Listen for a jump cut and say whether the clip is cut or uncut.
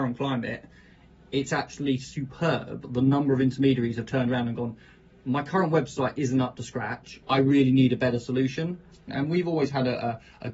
cut